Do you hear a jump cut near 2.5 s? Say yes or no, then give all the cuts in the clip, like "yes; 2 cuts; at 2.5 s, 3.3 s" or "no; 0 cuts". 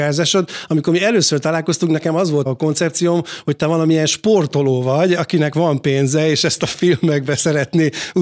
yes; 1 cut; at 2.5 s